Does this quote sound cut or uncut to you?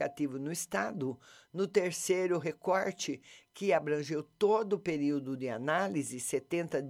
uncut